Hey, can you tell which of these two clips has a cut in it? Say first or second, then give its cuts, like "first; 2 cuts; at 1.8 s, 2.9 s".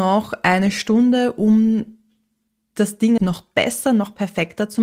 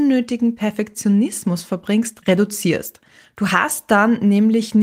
first; 1 cut; at 3.2 s